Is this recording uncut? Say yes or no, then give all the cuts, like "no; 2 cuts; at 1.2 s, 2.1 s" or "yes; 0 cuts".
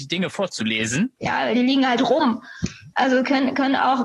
no; 2 cuts; at 1.2 s, 2.9 s